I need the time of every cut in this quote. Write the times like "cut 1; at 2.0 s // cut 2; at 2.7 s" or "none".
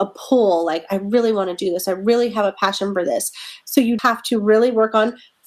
cut 1; at 4.0 s